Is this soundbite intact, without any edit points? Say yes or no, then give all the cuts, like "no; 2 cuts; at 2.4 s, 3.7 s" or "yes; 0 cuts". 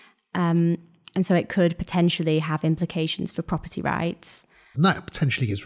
no; 1 cut; at 4.7 s